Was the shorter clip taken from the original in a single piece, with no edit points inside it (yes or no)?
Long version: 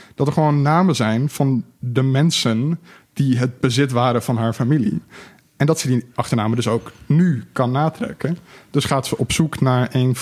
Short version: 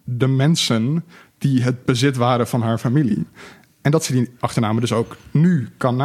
yes